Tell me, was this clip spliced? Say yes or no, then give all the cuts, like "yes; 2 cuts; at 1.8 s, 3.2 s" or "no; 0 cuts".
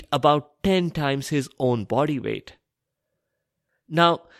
no; 0 cuts